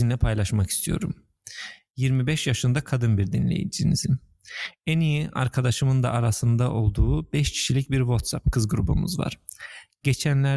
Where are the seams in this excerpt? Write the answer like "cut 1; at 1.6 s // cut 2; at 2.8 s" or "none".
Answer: none